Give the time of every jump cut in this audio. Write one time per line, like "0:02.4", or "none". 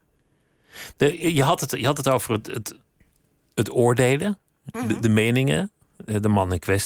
none